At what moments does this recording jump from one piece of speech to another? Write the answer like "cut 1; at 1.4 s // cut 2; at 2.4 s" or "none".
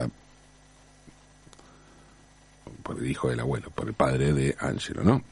none